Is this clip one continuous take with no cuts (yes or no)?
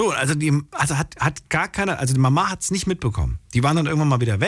yes